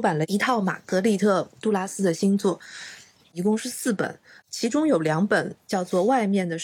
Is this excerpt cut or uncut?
uncut